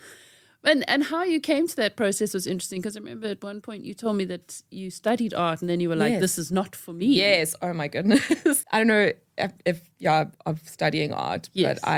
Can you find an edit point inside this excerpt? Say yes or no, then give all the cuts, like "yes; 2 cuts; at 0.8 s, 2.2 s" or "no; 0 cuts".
yes; 2 cuts; at 8.6 s, 10.3 s